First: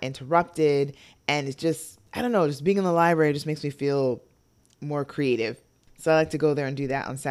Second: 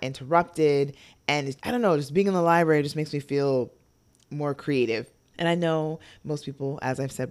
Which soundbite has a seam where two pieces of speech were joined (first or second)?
second